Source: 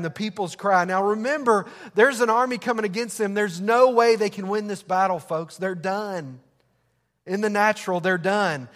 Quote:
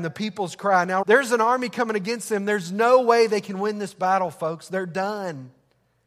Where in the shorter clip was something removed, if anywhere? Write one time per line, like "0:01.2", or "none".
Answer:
0:01.0